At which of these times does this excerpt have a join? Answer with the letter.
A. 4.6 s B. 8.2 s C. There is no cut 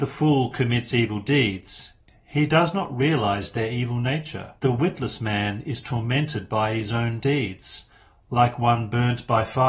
A